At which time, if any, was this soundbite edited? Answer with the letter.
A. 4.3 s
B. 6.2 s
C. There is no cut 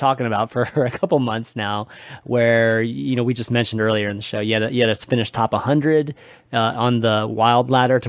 C